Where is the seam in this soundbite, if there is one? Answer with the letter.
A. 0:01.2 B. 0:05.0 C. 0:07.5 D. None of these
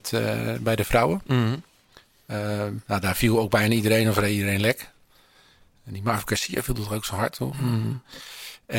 D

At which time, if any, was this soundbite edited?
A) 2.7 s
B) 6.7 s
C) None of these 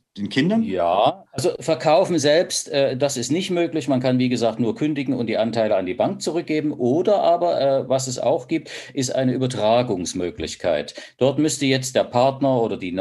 C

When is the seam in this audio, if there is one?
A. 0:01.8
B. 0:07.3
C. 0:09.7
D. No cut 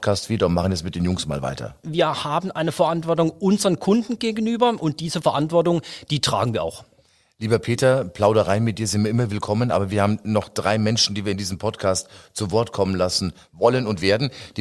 A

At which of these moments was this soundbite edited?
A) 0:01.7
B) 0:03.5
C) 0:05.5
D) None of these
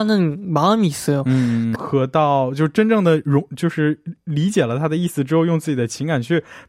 A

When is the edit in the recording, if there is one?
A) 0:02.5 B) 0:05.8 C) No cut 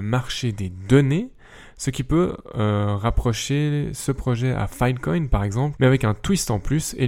B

